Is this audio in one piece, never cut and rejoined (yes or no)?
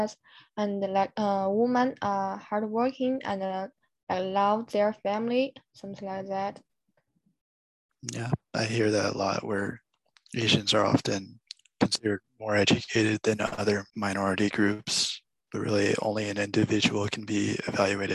no